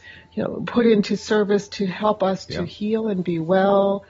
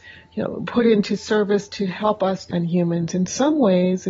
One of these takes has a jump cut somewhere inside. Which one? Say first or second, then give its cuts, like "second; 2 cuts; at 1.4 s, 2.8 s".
second; 1 cut; at 2.5 s